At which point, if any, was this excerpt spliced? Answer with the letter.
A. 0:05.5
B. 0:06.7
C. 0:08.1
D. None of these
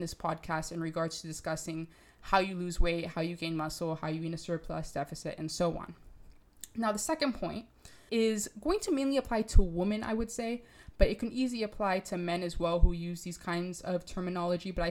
C